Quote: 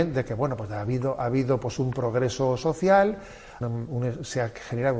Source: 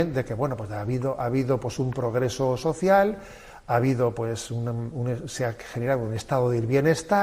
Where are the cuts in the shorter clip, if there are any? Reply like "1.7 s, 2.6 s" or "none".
3.6 s